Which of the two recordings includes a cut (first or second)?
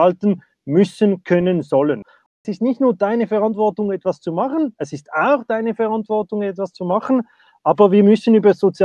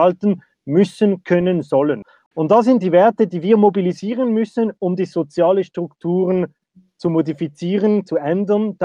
second